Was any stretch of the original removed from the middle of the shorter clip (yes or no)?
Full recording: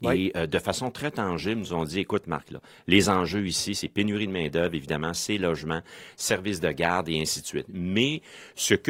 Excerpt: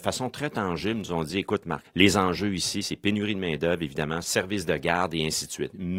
yes